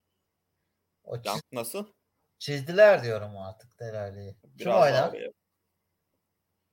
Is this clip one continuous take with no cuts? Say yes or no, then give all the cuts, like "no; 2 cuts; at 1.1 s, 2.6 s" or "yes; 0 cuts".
no; 2 cuts; at 1.4 s, 4.4 s